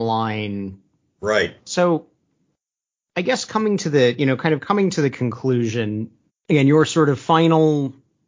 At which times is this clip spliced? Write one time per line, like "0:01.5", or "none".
0:01.6
0:06.3